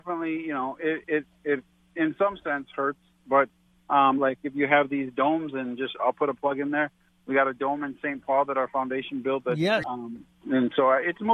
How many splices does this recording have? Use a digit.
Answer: 2